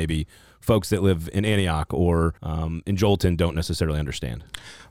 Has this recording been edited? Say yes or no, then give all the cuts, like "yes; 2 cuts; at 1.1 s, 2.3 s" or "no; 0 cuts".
yes; 1 cut; at 2.4 s